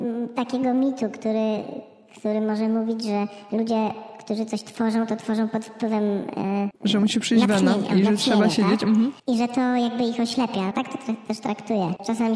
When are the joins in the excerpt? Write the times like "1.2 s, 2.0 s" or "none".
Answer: 9.2 s, 10.7 s

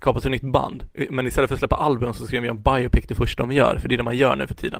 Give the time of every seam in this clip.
none

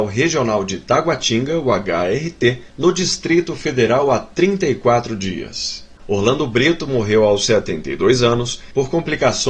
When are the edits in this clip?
6.0 s

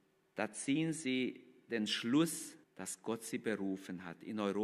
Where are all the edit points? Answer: 2.6 s

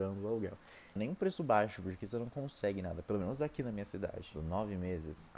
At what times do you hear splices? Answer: 1.0 s, 4.4 s

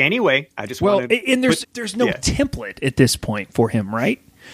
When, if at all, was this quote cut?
1.6 s

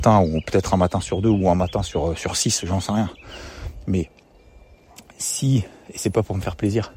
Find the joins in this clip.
none

